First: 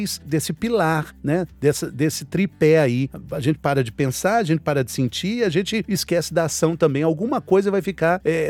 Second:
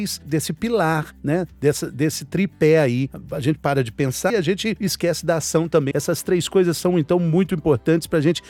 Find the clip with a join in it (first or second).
second